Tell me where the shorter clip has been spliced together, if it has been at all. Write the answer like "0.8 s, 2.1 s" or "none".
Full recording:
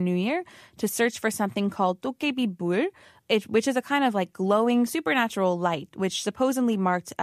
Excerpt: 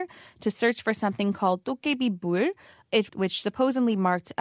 3.1 s